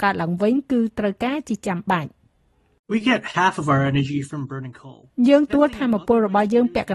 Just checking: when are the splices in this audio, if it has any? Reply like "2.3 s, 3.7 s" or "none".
5.5 s